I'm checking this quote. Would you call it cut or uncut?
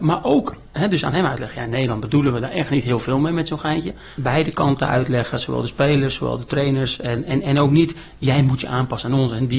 cut